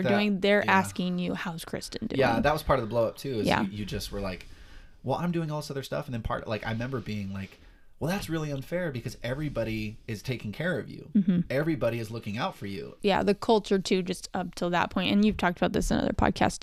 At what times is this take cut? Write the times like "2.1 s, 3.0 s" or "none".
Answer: 13.0 s